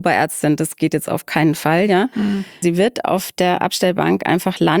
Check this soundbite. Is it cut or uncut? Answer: cut